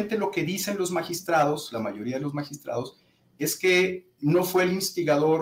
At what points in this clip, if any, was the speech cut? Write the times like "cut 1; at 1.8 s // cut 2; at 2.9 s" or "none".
none